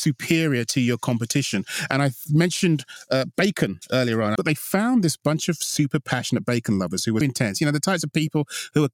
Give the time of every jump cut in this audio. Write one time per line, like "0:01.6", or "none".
0:04.4
0:07.2